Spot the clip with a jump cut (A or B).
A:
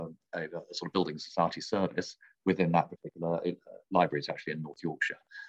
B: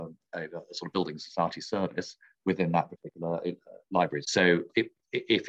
B